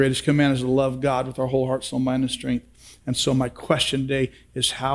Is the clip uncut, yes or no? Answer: yes